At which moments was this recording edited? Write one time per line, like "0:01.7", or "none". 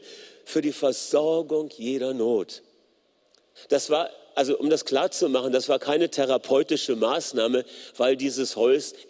0:03.6